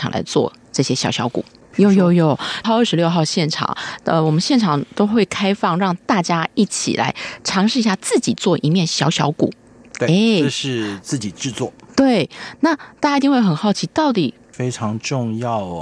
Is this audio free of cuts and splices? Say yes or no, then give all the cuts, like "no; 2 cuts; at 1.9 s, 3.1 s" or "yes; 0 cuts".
no; 2 cuts; at 1.7 s, 14.5 s